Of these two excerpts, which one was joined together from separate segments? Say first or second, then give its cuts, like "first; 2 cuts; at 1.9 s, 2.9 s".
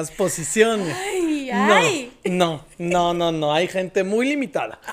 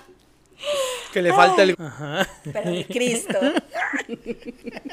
second; 1 cut; at 1.7 s